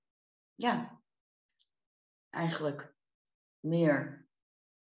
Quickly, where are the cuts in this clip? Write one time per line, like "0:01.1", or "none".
none